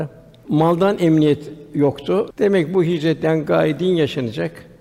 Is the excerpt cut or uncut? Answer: cut